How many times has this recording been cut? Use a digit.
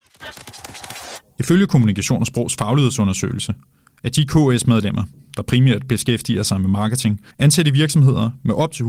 2